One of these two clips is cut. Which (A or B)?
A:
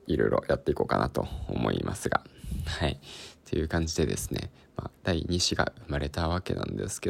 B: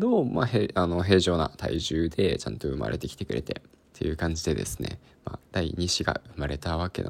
B